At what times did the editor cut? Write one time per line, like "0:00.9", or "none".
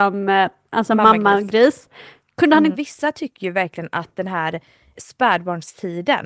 0:02.7
0:04.9